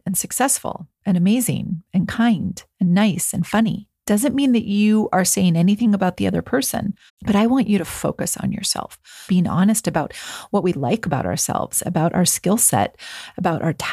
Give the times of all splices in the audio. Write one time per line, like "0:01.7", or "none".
0:07.1
0:09.3

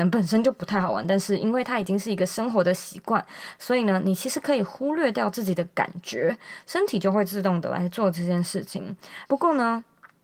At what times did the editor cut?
0:09.2

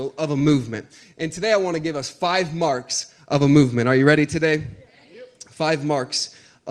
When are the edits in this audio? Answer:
none

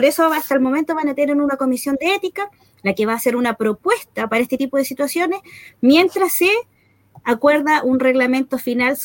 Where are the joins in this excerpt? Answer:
none

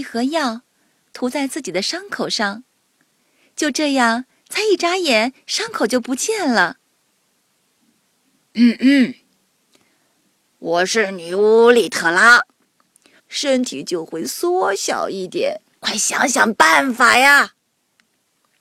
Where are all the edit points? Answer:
0:13.2
0:15.8

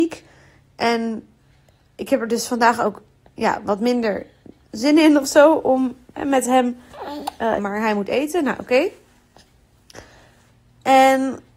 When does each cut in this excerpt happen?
0:07.6

